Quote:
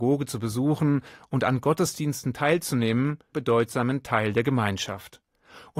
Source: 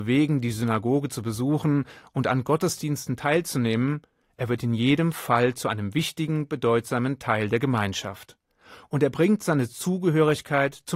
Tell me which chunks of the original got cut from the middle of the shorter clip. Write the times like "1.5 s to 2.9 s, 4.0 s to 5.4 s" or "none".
4.2 s to 6.5 s